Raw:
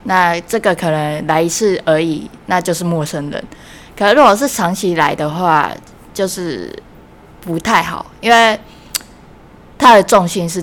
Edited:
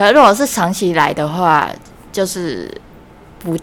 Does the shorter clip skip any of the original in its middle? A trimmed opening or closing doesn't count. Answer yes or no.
no